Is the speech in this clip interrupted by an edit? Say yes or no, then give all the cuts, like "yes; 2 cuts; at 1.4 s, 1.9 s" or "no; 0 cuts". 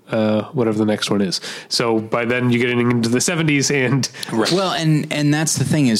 yes; 1 cut; at 4.4 s